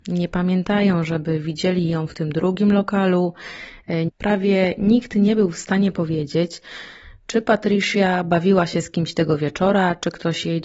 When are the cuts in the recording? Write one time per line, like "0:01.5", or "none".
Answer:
0:04.1